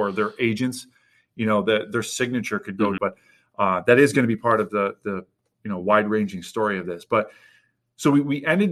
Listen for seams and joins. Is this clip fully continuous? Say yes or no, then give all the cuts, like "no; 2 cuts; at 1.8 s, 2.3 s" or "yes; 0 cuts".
no; 1 cut; at 3.0 s